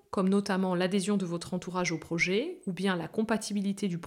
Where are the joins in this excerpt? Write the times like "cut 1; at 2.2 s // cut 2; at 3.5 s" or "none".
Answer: none